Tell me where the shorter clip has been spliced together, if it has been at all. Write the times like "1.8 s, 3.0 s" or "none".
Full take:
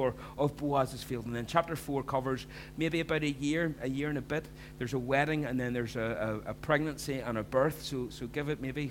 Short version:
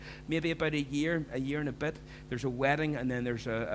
none